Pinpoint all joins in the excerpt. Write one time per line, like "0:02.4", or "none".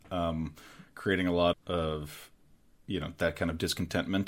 0:01.5